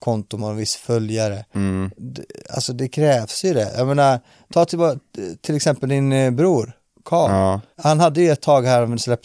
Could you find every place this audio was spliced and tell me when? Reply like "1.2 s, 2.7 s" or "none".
7.7 s